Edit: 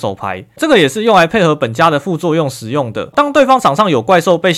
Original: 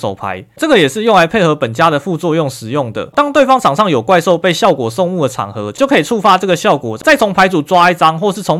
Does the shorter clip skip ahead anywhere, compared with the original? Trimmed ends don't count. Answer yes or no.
no